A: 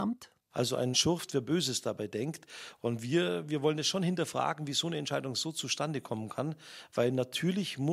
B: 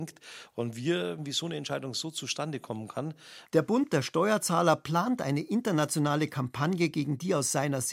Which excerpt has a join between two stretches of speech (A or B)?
B